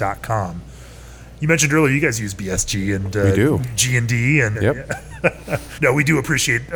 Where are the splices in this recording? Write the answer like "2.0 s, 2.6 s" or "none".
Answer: 4.5 s, 5.8 s